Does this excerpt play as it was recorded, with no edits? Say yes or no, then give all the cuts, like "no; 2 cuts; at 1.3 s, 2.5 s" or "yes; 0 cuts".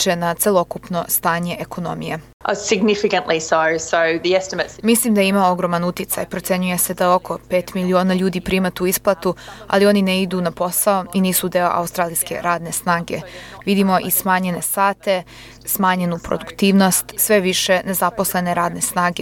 no; 1 cut; at 13.6 s